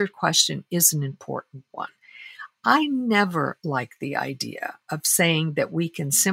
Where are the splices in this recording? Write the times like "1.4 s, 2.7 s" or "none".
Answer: none

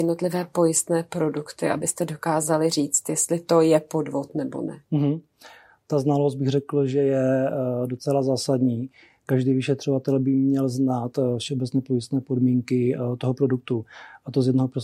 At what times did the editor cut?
none

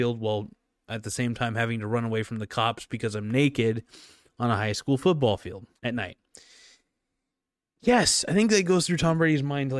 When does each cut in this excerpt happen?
5.8 s

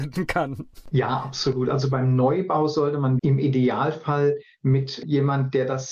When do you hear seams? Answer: 3.2 s

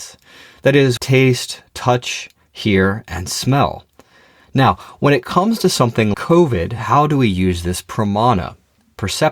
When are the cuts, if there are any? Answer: 1.0 s, 6.1 s

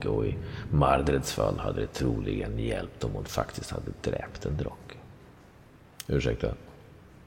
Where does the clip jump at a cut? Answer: none

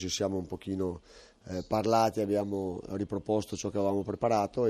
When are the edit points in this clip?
none

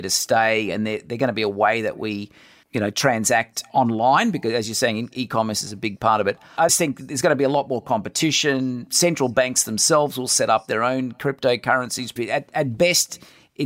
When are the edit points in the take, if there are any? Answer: 6.7 s, 12.2 s

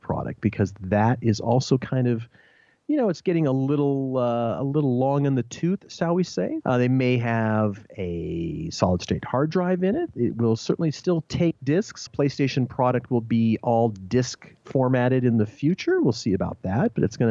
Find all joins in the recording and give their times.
6.6 s, 12.1 s

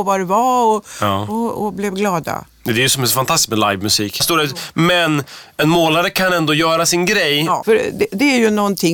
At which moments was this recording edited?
4.2 s, 7.6 s

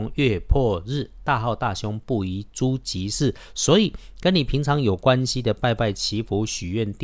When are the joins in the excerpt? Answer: none

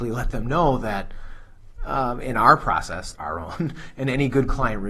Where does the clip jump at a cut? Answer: 3.1 s

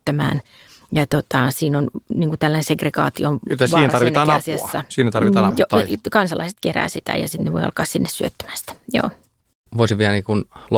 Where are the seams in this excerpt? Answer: 5.5 s

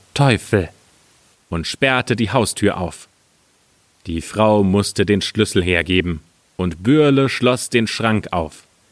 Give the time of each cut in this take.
1.3 s

